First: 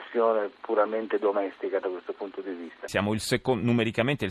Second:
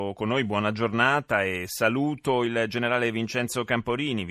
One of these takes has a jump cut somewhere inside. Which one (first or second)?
first